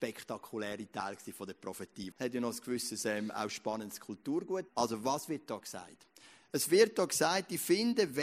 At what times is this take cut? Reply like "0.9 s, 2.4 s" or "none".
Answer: 2.1 s, 4.7 s